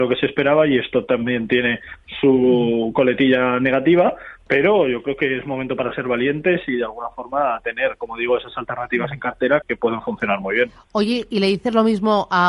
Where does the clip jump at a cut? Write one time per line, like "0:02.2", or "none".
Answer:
0:09.6